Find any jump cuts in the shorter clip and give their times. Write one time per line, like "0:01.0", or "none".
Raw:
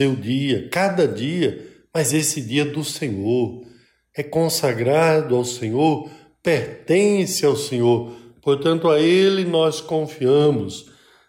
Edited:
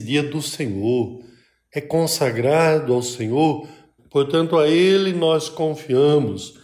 0:04.0

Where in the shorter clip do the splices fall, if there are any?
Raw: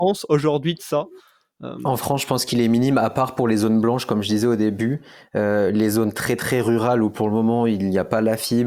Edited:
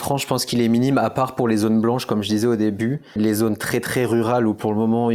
0:03.2

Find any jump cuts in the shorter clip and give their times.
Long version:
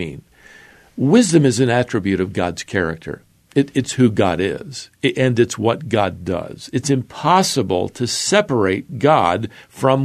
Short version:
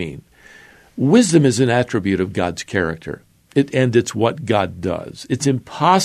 0:03.7

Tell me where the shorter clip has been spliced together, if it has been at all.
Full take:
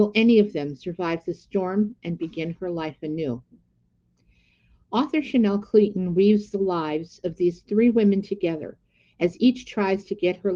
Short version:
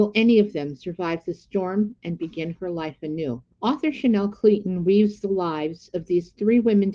0:03.5

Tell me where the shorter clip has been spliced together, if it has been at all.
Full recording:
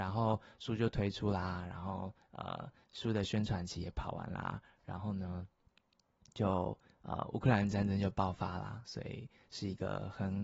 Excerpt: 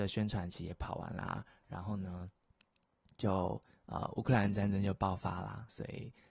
none

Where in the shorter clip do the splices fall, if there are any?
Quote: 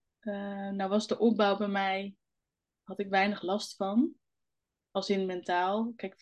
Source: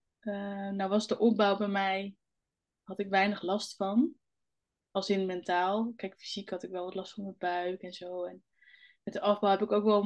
none

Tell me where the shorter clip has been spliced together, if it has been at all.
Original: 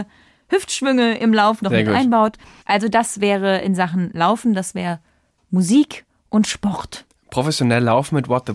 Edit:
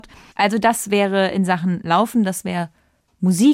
none

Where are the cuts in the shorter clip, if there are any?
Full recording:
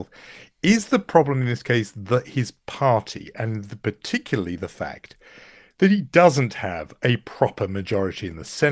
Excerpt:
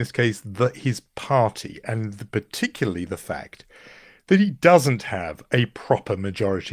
none

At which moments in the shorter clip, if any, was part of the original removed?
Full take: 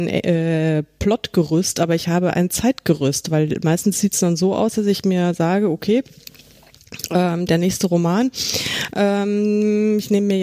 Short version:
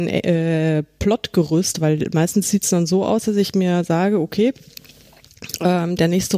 0:01.7

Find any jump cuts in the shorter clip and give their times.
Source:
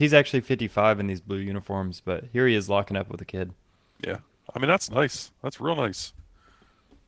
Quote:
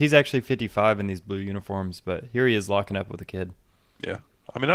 none

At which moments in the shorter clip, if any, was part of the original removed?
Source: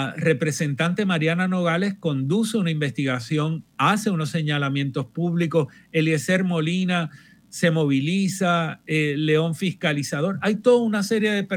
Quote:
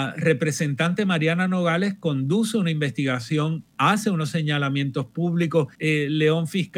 0:05.7

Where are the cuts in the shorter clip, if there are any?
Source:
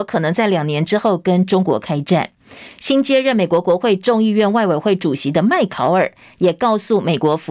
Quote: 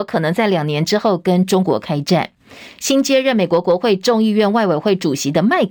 none

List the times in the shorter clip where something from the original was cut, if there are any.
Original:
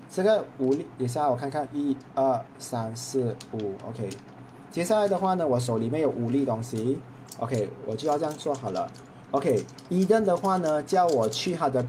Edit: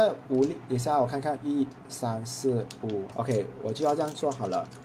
0:01.8
0:03.1

